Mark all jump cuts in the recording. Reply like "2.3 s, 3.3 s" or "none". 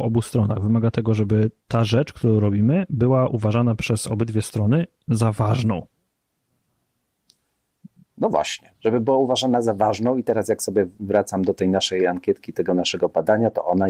none